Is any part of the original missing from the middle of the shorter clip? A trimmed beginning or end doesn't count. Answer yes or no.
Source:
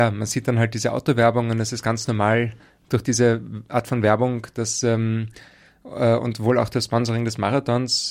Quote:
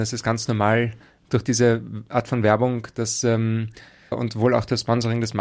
yes